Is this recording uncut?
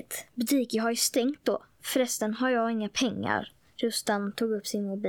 yes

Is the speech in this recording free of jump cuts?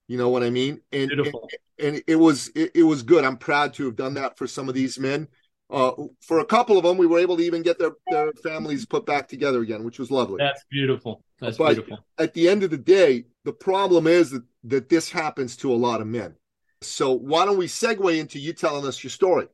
no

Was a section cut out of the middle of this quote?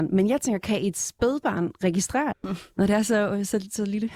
yes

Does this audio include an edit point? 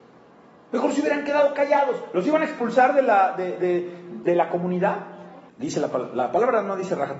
yes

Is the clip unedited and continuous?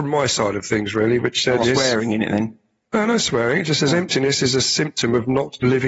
no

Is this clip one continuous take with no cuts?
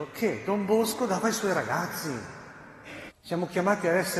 no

